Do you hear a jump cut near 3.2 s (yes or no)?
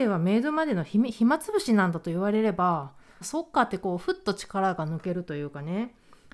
yes